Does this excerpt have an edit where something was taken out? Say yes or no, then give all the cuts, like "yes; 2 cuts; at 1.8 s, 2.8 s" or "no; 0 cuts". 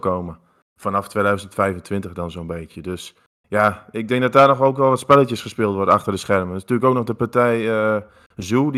no; 0 cuts